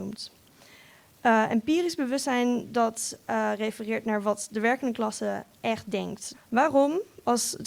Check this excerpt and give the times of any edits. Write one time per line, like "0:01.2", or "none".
0:06.3